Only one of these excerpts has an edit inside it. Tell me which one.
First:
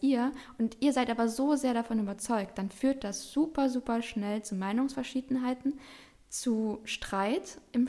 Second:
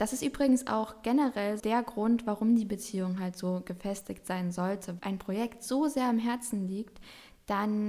second; 2 cuts; at 1.6 s, 5.0 s

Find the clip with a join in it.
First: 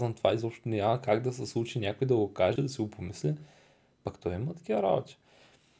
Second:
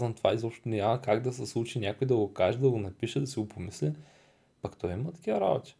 first; 1 cut; at 2.6 s

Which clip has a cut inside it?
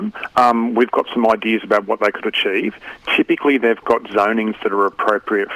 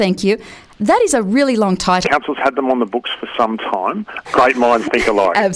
second; 2 cuts; at 2.0 s, 4.2 s

